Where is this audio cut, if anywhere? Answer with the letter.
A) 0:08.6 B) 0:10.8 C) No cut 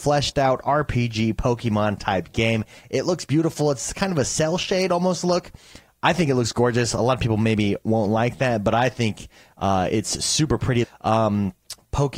B